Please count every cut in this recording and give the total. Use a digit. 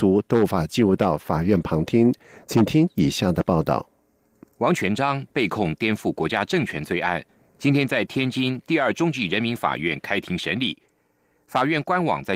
0